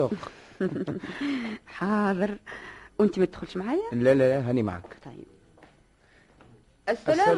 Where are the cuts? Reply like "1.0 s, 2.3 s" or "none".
none